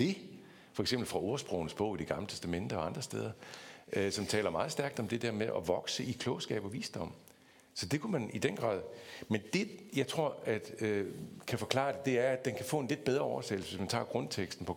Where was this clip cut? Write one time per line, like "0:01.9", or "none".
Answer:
none